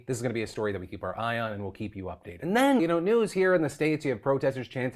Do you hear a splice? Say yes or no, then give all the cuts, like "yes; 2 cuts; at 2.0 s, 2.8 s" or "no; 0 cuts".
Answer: yes; 1 cut; at 2.8 s